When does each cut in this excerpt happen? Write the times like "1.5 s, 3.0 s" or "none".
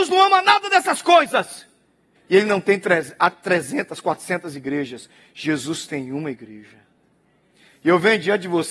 2.2 s